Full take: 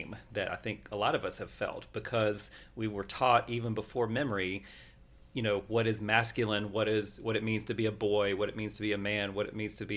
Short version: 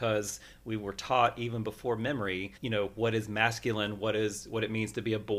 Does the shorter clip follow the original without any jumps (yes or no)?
no